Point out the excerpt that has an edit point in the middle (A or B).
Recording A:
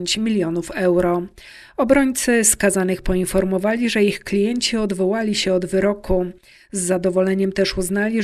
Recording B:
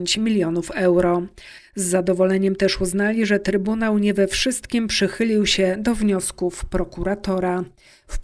B